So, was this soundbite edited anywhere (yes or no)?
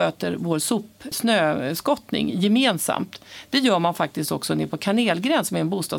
yes